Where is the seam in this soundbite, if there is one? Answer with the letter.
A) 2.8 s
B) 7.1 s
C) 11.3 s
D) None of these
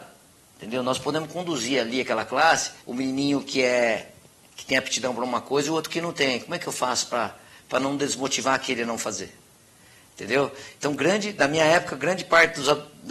A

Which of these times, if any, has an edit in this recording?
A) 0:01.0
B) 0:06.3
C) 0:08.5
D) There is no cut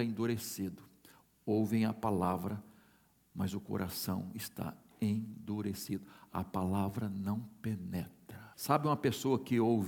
C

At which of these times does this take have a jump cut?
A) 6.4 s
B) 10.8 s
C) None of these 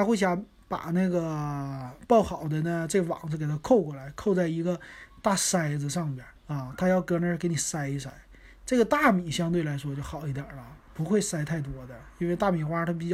A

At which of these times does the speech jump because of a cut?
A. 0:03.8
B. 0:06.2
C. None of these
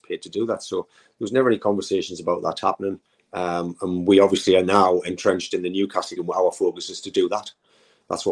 B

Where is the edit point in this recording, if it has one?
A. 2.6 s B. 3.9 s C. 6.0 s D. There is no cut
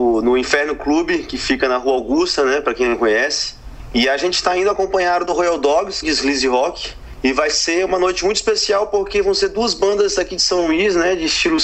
C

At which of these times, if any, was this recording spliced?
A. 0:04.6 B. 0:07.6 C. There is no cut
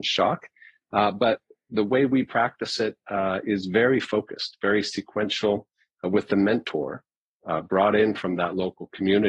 C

